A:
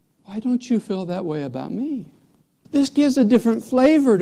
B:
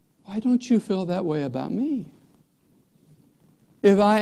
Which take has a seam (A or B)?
A